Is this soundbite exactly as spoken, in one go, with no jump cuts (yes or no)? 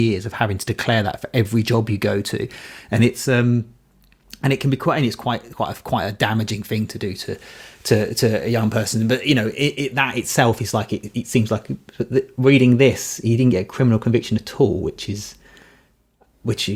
yes